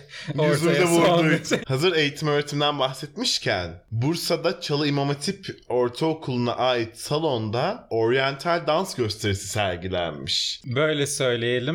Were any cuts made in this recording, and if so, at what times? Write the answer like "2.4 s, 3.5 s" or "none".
1.6 s, 10.6 s